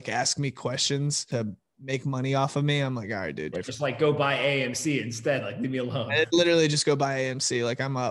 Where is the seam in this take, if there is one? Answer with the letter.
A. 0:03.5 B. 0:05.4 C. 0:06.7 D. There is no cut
A